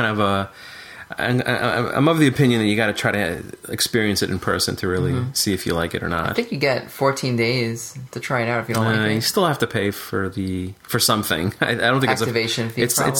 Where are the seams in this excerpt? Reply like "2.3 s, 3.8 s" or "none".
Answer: 10.8 s